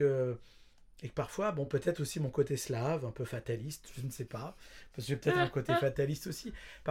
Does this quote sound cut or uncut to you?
uncut